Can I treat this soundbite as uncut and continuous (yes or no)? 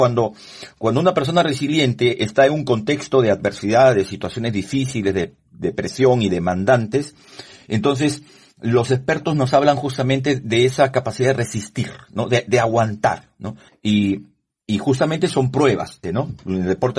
no